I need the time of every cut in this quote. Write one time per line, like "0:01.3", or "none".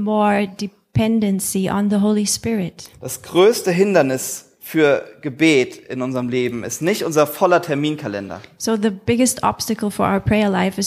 none